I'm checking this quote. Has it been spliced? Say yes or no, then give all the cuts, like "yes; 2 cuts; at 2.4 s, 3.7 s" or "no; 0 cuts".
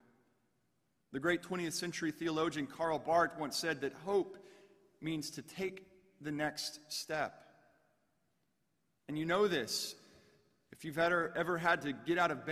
yes; 1 cut; at 1.0 s